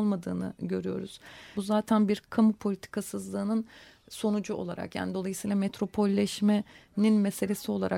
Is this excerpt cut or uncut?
cut